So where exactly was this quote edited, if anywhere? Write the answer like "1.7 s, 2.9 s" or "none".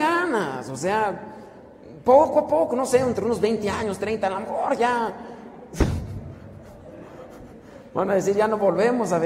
none